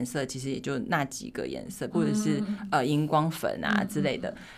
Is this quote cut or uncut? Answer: cut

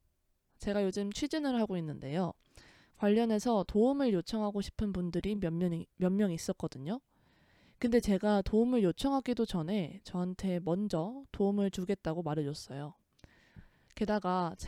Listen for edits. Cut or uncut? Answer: uncut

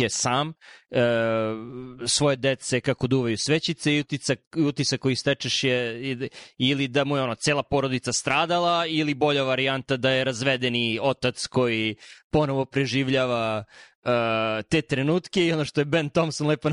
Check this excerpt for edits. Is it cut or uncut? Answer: uncut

